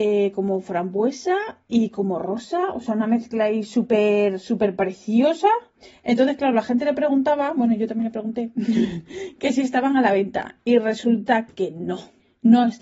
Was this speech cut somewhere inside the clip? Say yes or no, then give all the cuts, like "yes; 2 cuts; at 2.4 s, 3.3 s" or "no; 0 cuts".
no; 0 cuts